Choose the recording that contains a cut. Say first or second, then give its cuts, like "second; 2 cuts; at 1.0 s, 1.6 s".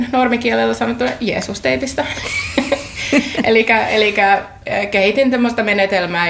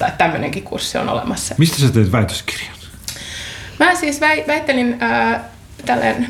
second; 1 cut; at 1.6 s